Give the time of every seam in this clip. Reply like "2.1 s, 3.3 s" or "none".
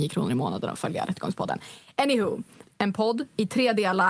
2.6 s